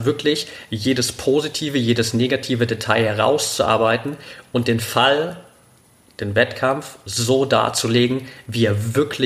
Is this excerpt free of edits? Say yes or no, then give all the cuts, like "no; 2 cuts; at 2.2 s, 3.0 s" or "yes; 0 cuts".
yes; 0 cuts